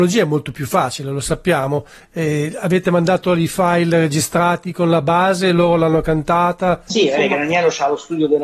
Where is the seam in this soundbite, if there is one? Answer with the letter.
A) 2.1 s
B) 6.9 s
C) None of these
B